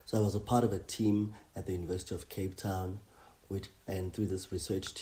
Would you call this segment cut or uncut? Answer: uncut